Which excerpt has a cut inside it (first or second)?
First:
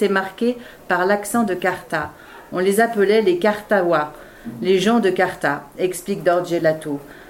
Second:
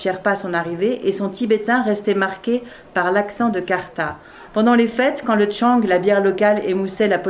second